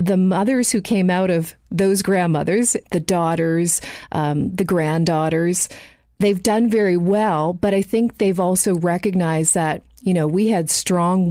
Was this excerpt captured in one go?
yes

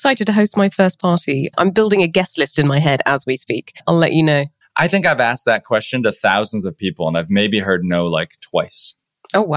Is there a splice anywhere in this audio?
yes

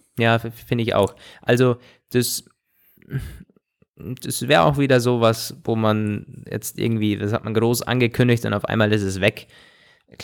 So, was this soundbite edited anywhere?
no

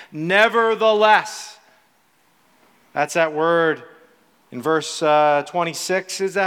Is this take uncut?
yes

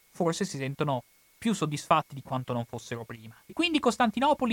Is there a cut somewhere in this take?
yes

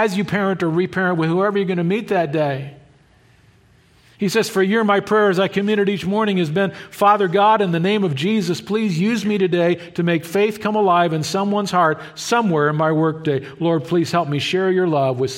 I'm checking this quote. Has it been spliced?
no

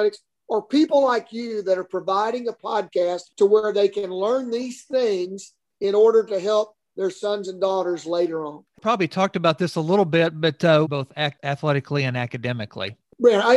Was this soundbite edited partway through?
yes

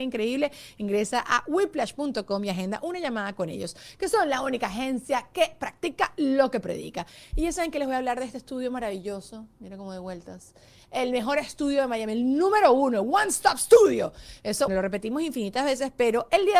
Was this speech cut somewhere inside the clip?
yes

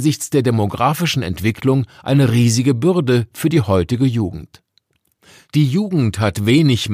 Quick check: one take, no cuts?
yes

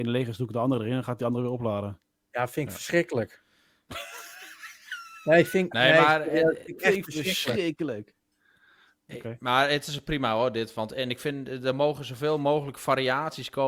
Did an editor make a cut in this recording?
no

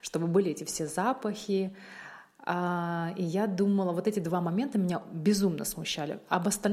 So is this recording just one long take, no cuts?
yes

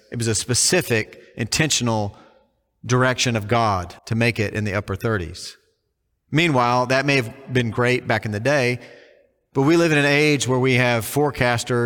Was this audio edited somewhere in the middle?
yes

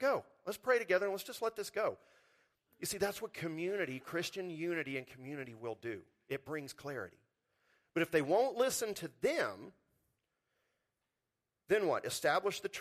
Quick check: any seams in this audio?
no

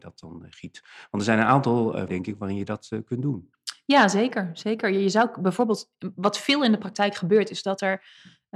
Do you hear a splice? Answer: yes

